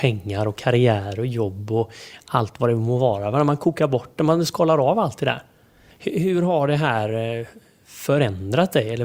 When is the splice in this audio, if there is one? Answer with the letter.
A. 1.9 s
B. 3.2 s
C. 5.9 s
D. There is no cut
C